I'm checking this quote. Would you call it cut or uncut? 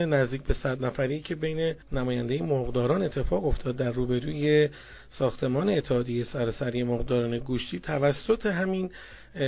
cut